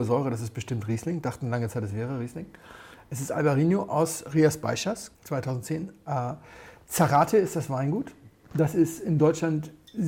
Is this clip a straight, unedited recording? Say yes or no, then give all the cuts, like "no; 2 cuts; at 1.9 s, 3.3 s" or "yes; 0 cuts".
no; 1 cut; at 5.2 s